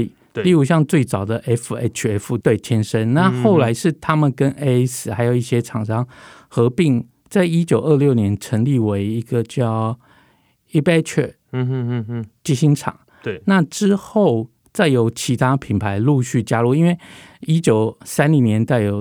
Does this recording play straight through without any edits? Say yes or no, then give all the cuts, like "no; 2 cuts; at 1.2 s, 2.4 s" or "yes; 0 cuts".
no; 1 cut; at 2.4 s